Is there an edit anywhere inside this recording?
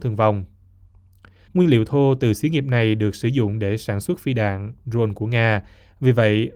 yes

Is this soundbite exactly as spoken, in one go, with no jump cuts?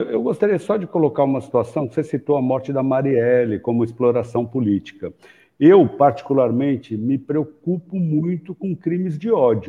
yes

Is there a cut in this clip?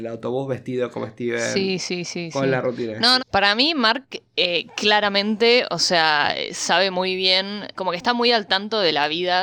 yes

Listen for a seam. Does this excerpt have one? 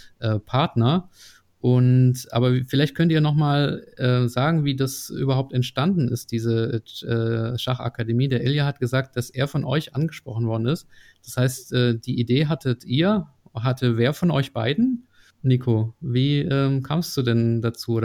no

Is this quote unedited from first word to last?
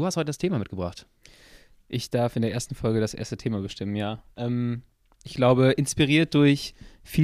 yes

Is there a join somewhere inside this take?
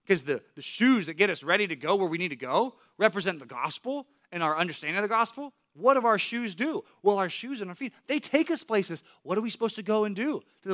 no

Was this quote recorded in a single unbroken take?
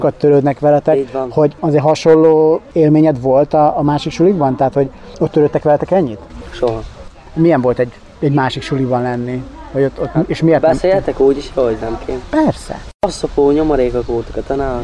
yes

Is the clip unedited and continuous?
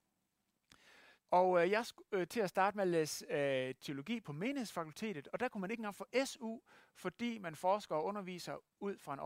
no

